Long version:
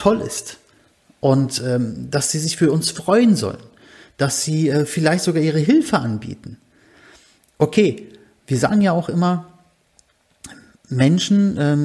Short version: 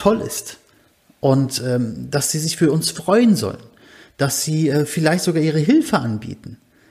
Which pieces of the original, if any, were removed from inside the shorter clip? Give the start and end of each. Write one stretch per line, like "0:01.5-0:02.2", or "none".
none